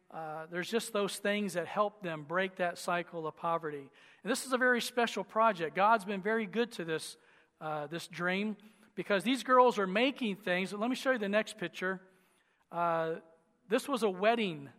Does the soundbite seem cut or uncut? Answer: uncut